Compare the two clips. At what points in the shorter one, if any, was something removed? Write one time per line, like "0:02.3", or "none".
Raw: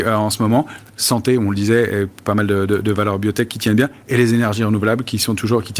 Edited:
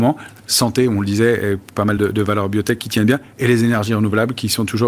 0:02.0